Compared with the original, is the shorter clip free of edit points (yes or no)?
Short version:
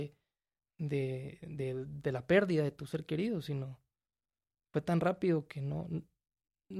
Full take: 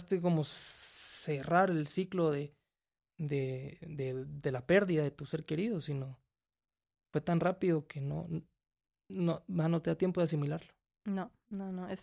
yes